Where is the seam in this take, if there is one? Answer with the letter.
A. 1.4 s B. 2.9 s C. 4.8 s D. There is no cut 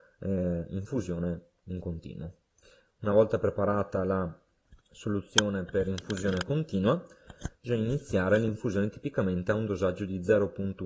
C